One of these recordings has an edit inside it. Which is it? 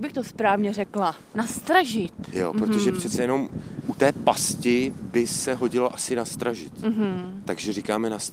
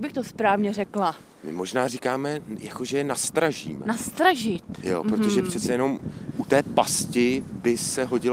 first; 1 cut; at 1.3 s

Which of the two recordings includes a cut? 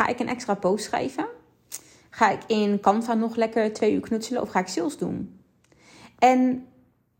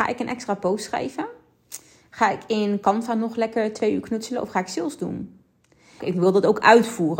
second; 1 cut; at 6.0 s

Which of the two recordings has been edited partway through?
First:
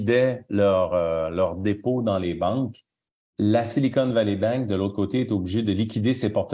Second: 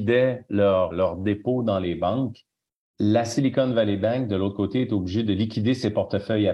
second; 1 cut; at 0.9 s

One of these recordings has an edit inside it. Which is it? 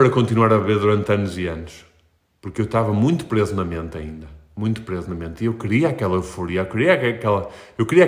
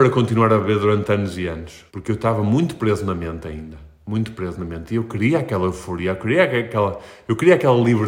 second; 1 cut; at 1.9 s

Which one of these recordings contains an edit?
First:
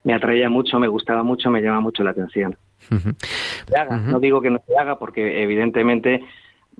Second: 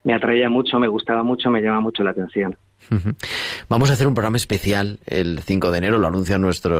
first; 1 cut; at 3.7 s

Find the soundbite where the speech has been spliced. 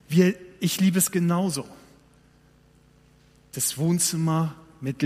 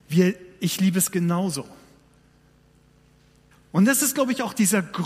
second; 1 cut; at 3.5 s

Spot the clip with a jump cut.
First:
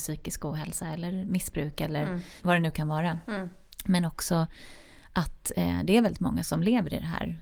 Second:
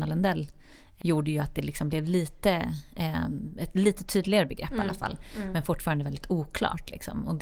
second; 1 cut; at 1.0 s

